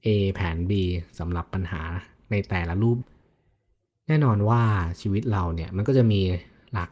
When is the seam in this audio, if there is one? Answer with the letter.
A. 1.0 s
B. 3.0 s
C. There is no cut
B